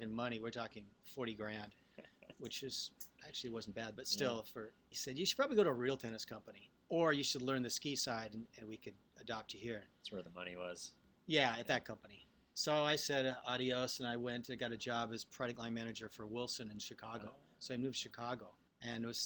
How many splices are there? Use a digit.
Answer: 1